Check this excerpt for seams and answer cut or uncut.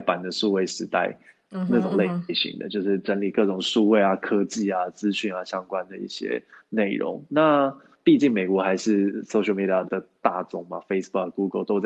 cut